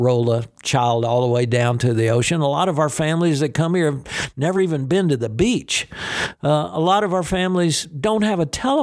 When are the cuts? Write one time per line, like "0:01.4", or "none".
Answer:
none